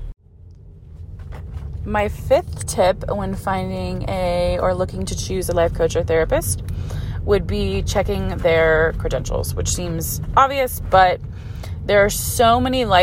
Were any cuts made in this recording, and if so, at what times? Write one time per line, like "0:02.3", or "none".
none